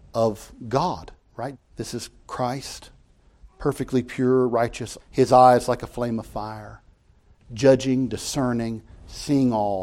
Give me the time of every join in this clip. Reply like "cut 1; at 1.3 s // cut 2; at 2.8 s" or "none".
cut 1; at 1.5 s // cut 2; at 5.0 s